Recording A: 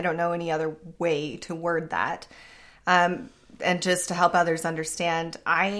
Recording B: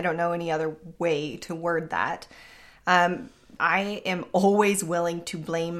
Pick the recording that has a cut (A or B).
B